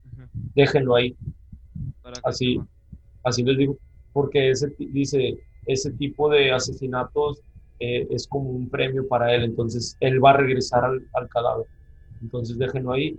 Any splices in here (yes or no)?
no